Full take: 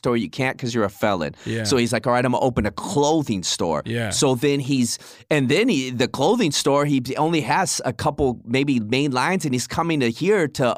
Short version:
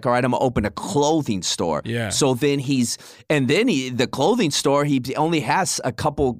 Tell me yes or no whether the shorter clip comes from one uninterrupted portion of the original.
yes